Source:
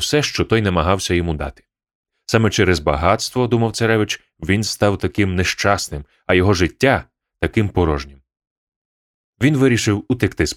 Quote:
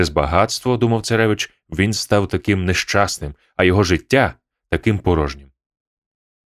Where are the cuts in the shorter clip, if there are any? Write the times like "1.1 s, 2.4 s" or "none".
none